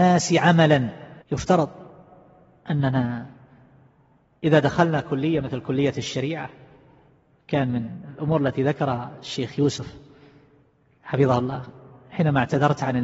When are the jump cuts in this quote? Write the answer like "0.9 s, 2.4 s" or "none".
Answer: 1.2 s